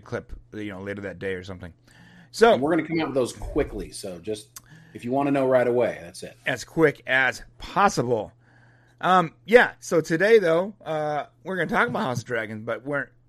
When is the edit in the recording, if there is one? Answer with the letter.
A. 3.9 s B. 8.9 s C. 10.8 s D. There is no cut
D